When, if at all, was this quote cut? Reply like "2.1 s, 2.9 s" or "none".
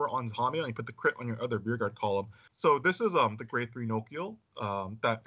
2.5 s